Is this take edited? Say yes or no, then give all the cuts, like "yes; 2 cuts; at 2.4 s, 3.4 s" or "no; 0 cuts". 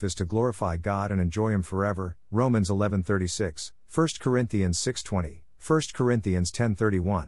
no; 0 cuts